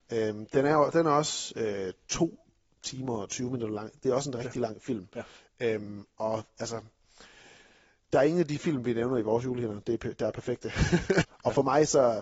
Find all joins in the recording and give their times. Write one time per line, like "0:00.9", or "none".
0:11.2